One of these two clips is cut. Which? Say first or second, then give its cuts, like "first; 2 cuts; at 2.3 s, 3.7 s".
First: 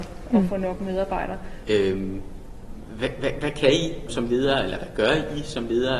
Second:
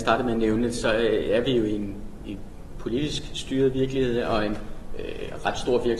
first; 2 cuts; at 1.6 s, 4.1 s